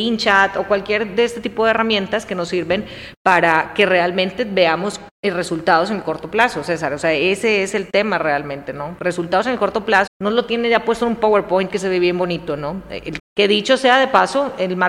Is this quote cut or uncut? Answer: cut